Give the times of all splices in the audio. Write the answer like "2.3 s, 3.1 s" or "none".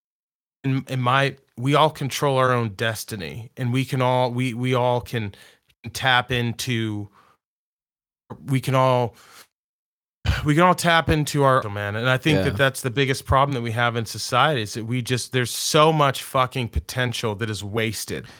11.6 s